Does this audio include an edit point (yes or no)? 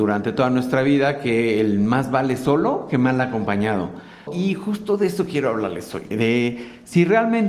yes